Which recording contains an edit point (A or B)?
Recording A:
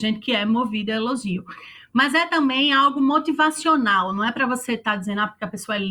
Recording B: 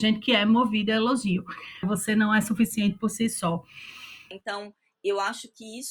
B